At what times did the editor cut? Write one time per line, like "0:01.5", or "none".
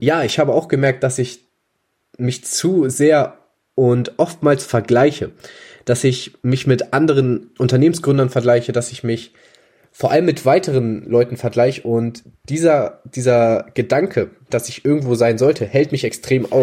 0:07.6
0:14.5